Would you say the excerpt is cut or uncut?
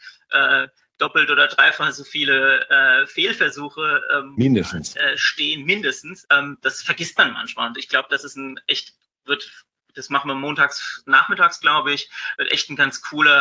cut